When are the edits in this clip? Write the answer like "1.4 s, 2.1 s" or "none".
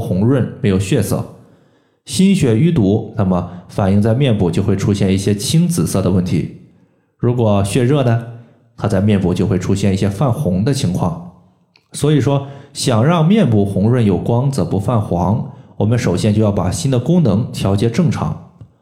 none